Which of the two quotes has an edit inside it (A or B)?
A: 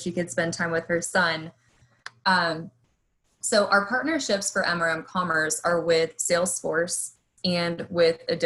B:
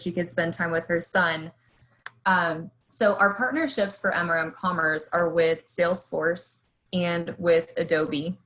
B